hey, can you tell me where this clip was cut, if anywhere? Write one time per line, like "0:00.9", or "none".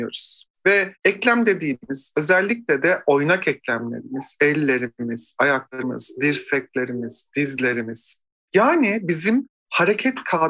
none